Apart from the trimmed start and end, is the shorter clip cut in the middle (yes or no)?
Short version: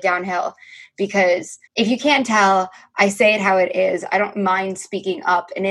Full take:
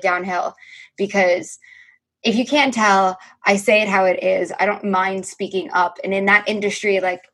yes